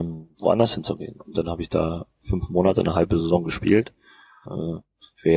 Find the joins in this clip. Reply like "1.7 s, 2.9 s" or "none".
4.5 s